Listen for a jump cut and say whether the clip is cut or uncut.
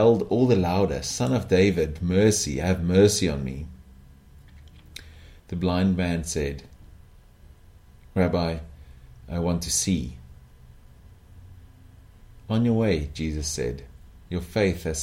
cut